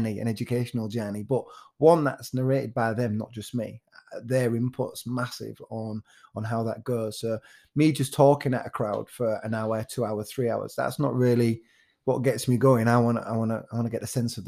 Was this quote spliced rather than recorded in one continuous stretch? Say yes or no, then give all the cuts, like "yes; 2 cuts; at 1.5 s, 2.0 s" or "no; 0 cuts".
no; 0 cuts